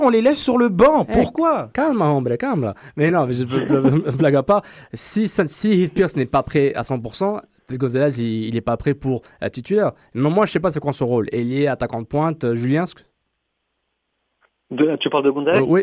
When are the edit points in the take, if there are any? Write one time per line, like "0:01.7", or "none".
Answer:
none